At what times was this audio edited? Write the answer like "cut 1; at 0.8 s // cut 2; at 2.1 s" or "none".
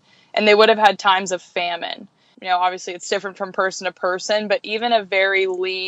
cut 1; at 2.3 s